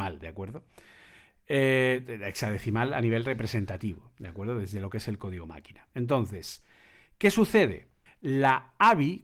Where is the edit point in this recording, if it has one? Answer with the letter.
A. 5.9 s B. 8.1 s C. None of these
B